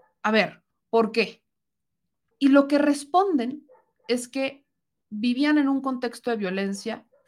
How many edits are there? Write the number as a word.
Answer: one